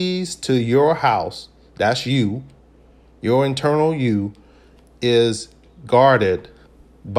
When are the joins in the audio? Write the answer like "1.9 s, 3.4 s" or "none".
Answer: none